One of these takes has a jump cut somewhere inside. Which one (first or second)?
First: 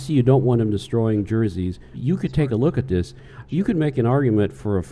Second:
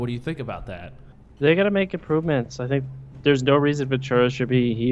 first